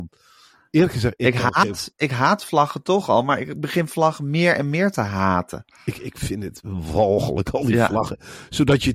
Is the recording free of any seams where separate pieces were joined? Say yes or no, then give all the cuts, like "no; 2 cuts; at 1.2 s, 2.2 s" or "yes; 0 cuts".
yes; 0 cuts